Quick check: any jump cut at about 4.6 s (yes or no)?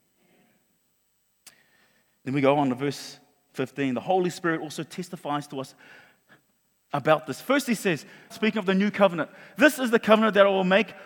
no